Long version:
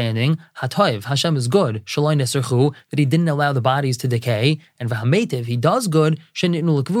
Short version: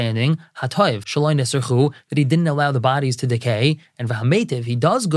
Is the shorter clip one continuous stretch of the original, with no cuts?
no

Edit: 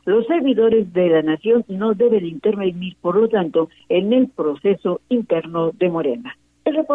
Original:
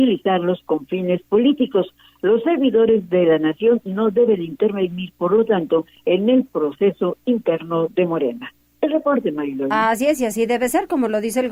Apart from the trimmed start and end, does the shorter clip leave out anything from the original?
no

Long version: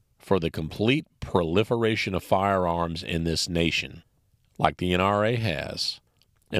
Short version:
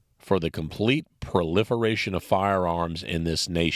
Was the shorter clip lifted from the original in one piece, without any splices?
yes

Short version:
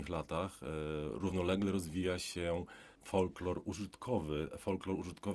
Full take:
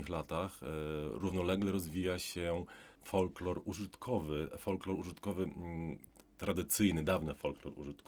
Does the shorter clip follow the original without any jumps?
yes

